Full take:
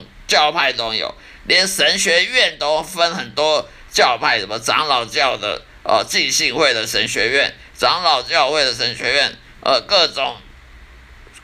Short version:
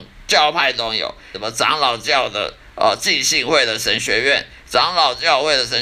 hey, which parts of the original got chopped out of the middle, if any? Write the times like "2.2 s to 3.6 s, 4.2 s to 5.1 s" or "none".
1.3 s to 4.4 s